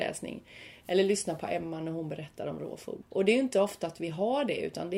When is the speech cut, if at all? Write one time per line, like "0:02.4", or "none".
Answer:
0:03.0